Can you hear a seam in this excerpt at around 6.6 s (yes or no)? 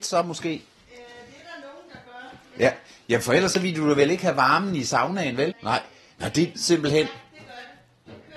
yes